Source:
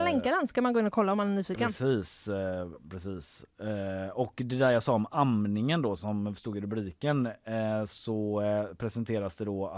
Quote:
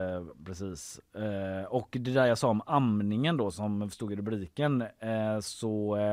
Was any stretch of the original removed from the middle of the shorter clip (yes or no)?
no